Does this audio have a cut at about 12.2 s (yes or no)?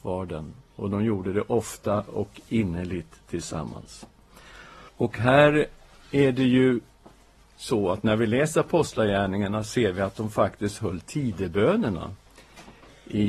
no